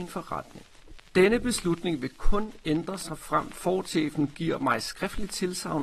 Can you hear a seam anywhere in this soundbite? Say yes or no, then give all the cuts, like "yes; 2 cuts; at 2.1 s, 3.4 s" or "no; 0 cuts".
no; 0 cuts